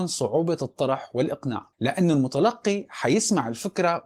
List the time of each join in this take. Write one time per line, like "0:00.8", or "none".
0:01.7